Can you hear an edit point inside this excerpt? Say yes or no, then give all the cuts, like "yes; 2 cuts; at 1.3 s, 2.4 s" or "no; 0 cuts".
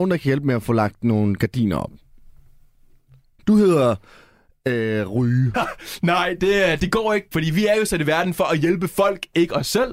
yes; 3 cuts; at 3.4 s, 5.5 s, 7.3 s